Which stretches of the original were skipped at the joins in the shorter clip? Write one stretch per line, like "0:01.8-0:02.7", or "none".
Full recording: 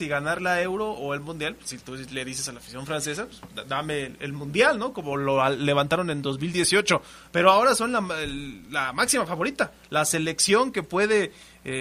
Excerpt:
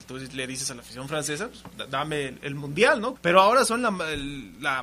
0:04.9-0:07.3